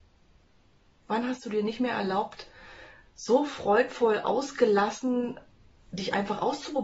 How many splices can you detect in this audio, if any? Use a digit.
0